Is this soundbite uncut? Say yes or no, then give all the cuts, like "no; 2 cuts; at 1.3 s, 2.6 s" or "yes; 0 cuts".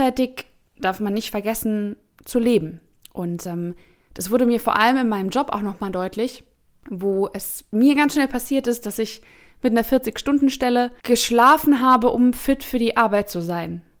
yes; 0 cuts